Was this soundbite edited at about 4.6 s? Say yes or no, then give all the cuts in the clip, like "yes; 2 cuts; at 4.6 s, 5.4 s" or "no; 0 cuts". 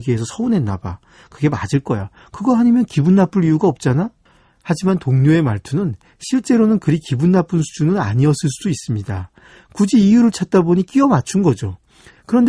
no; 0 cuts